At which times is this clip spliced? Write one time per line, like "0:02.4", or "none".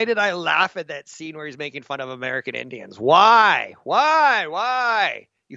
none